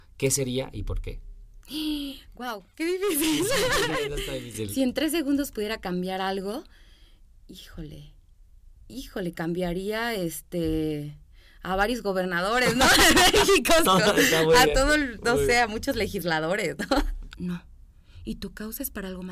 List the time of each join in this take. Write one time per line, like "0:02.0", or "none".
0:08.8
0:13.9
0:17.3

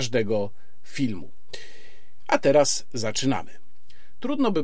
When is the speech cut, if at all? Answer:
none

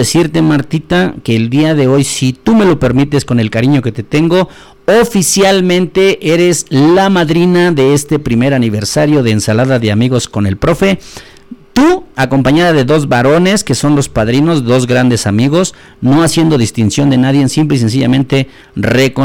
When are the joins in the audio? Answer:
none

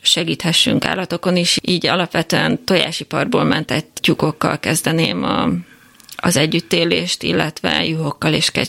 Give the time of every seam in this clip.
none

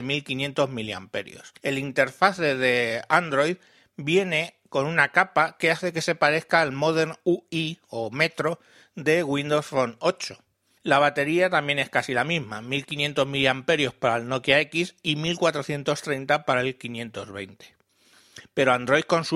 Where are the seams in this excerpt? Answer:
0:01.6
0:10.8

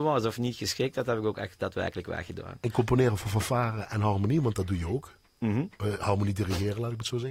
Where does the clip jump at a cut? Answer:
none

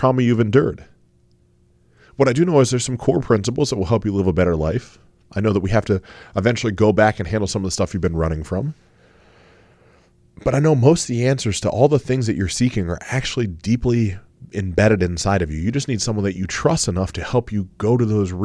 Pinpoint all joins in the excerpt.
none

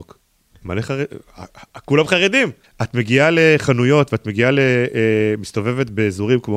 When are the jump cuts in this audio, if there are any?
0:02.6

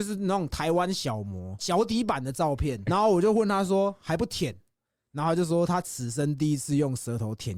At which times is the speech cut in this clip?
0:02.9

